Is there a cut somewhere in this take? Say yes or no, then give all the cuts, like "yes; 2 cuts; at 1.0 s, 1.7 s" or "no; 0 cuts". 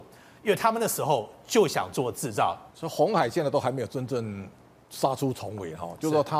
yes; 1 cut; at 2.7 s